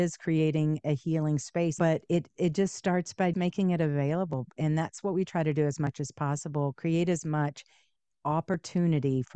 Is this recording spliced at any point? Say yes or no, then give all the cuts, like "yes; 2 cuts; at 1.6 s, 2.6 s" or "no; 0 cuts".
yes; 2 cuts; at 1.8 s, 3.3 s